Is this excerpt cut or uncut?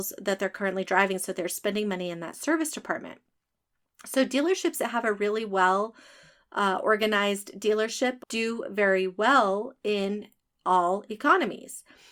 cut